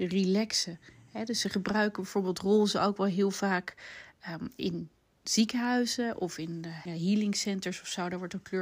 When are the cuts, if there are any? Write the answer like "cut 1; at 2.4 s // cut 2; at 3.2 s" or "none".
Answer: cut 1; at 6.9 s